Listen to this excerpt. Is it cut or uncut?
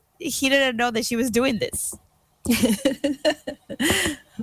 uncut